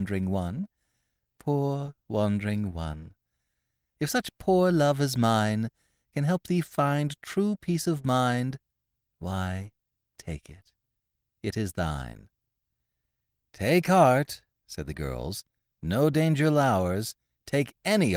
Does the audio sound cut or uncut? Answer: uncut